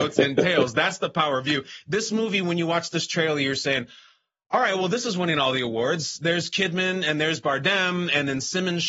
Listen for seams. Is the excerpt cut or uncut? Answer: uncut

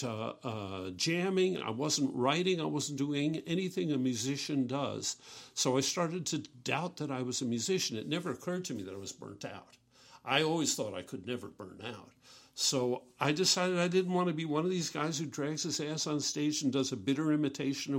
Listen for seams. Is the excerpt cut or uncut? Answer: uncut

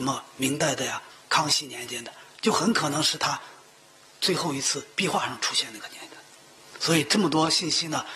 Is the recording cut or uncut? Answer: uncut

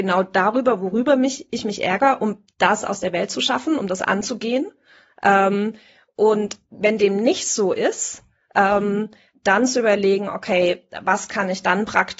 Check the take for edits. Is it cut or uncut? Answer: uncut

